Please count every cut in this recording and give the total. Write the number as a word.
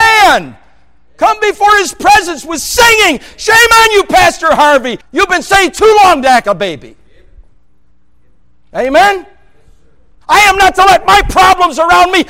three